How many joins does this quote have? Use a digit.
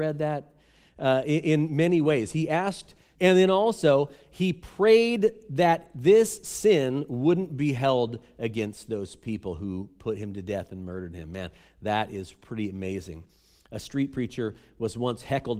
1